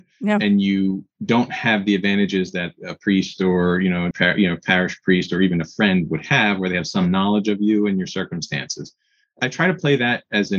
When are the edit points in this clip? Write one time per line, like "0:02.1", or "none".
0:04.1